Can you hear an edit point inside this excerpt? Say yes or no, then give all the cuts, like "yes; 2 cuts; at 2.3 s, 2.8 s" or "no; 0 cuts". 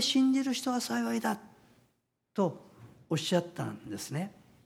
no; 0 cuts